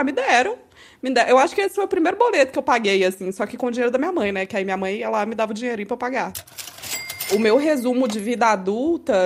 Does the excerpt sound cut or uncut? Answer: uncut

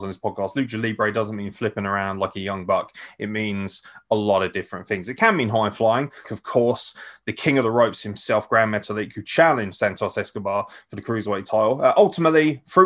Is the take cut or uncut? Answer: cut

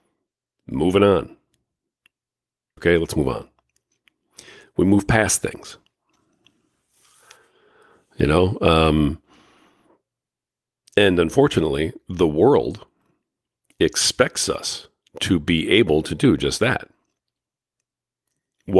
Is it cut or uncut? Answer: cut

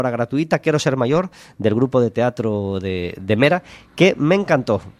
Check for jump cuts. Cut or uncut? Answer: uncut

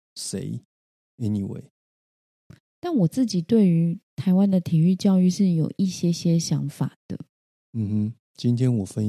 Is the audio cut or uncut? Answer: cut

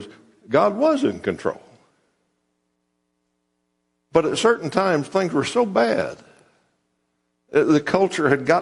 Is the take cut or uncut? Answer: uncut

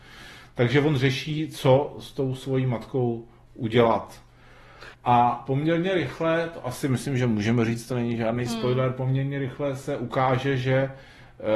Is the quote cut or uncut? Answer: cut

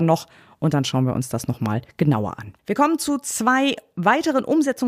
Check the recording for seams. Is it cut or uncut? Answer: cut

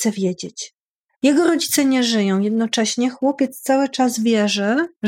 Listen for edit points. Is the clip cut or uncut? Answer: cut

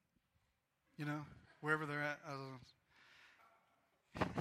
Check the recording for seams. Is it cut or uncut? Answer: cut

